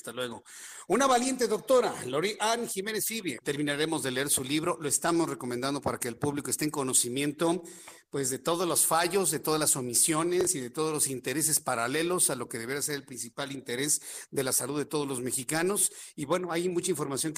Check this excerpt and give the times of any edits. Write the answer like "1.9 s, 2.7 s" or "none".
3.4 s